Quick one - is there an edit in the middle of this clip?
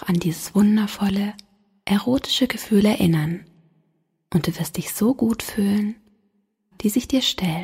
yes; 1 cut; at 6.7 s

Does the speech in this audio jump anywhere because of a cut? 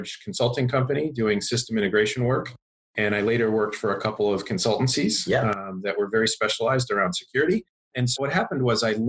no; 0 cuts

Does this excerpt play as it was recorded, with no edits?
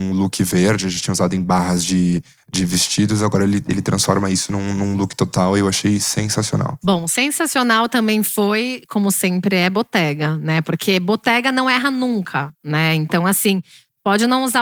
yes; 0 cuts

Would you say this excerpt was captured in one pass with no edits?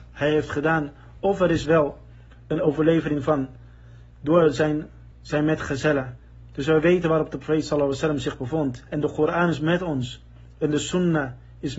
no; 1 cut; at 5.1 s

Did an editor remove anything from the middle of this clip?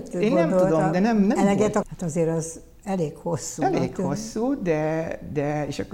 yes; 1 cut; at 1.8 s

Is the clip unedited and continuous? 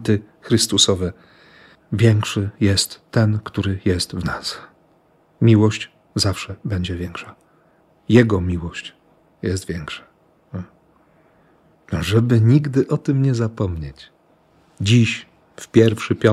yes; 0 cuts

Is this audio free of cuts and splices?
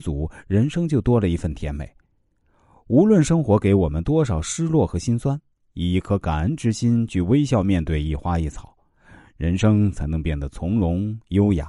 yes; 0 cuts

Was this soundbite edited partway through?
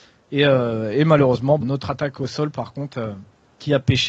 yes; 1 cut; at 1.6 s

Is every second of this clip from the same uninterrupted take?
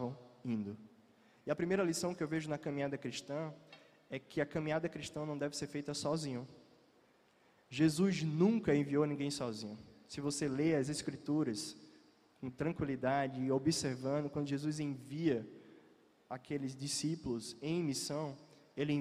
yes; 0 cuts

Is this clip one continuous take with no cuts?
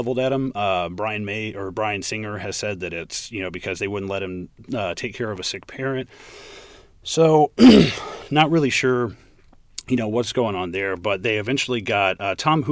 yes; 0 cuts

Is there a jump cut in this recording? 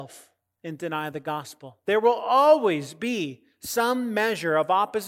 no; 0 cuts

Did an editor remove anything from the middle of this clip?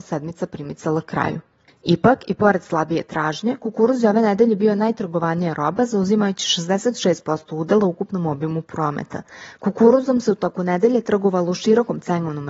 yes; 1 cut; at 9.6 s

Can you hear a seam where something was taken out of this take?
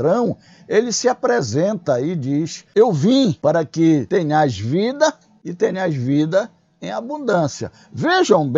no; 0 cuts

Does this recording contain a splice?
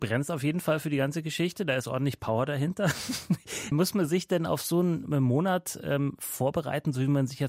no; 0 cuts

